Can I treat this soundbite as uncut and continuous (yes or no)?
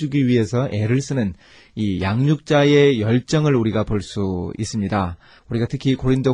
yes